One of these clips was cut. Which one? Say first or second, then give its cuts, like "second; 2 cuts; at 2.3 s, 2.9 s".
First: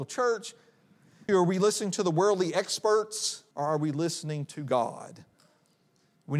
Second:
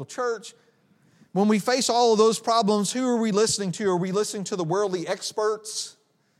first; 2 cuts; at 1.3 s, 3.5 s